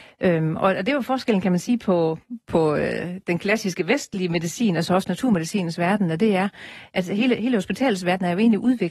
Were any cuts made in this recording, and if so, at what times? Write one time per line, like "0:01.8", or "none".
none